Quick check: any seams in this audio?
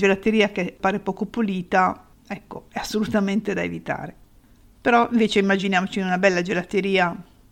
no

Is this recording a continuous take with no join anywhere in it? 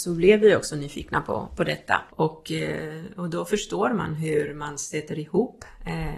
no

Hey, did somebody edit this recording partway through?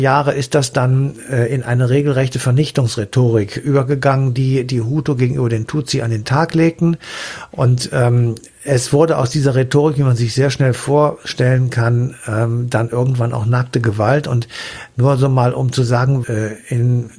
yes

